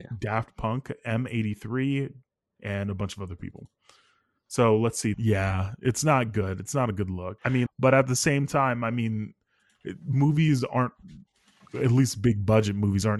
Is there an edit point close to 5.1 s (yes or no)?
yes